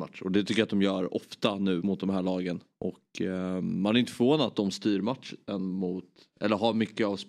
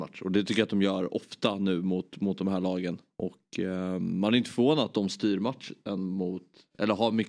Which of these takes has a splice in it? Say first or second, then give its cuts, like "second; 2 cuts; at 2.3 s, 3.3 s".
first; 1 cut; at 1.8 s